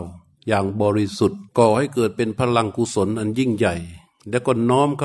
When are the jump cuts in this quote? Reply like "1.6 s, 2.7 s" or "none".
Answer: 1.5 s

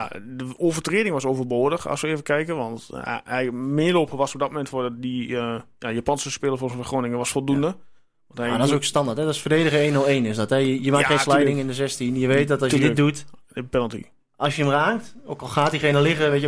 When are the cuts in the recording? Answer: none

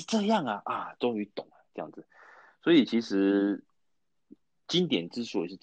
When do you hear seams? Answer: none

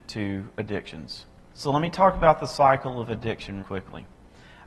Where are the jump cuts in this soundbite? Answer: 1.5 s, 3.6 s

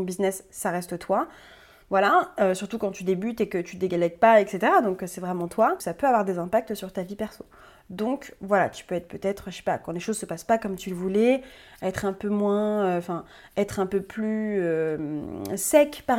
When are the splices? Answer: none

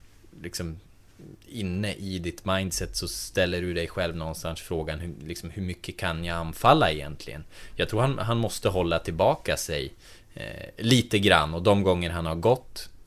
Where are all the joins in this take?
1.4 s

